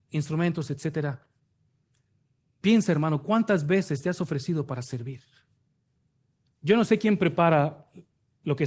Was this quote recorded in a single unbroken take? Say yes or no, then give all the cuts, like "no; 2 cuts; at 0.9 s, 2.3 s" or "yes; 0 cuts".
no; 1 cut; at 6.4 s